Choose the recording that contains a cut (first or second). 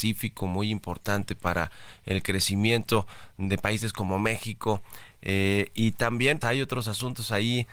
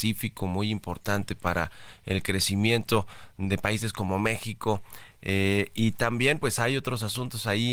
first